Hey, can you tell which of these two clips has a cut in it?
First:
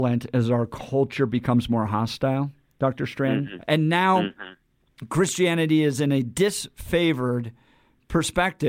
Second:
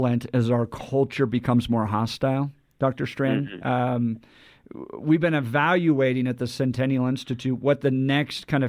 first; 1 cut; at 3.6 s

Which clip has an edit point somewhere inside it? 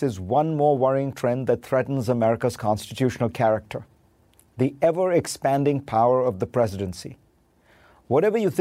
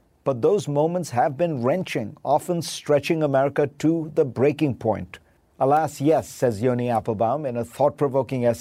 second; 1 cut; at 5.4 s

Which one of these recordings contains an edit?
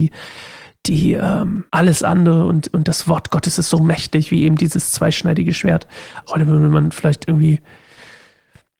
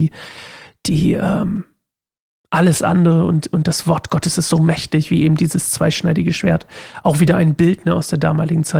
first; 2 cuts; at 1.7 s, 6.2 s

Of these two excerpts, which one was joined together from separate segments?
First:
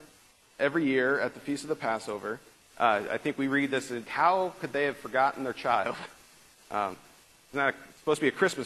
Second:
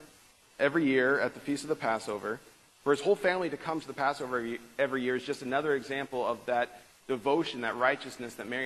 first; 3 cuts; at 2.6 s, 4.1 s, 7.3 s

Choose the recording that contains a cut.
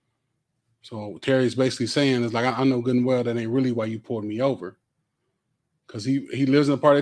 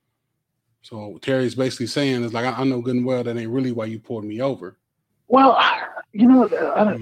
second; 1 cut; at 5.1 s

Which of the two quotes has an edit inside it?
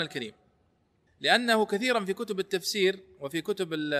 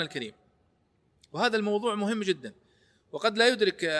first; 1 cut; at 1.1 s

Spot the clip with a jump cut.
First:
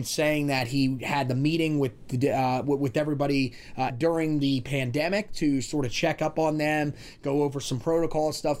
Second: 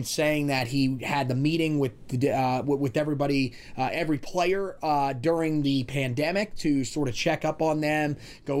first; 1 cut; at 3.9 s

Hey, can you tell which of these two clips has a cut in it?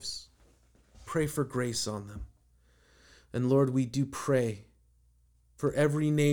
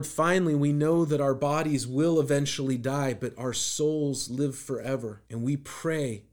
second; 1 cut; at 5.3 s

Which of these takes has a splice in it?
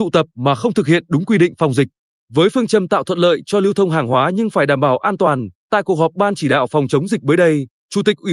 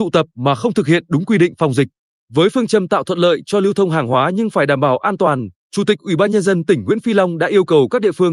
second; 1 cut; at 5.6 s

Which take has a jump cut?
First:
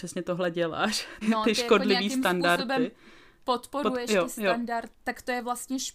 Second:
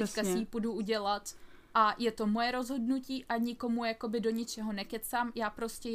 first; 2 cuts; at 1.2 s, 4.9 s

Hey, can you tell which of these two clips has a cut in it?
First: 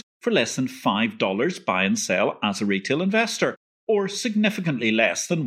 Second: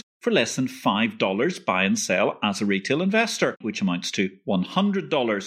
second; 1 cut; at 3.6 s

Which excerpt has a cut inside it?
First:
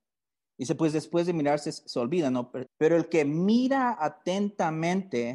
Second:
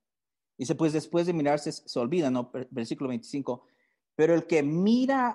first; 1 cut; at 2.7 s

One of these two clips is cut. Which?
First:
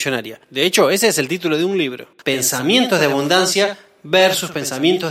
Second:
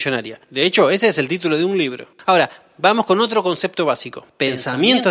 first; 1 cut; at 2.2 s

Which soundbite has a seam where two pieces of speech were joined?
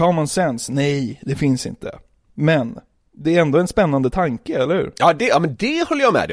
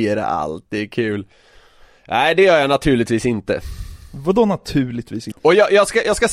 second; 1 cut; at 5.3 s

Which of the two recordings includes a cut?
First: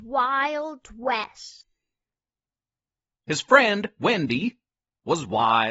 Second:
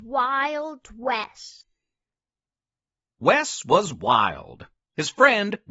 first; 1 cut; at 3.1 s

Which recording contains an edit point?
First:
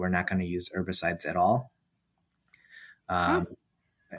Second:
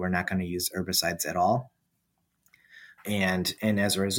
second; 1 cut; at 3.0 s

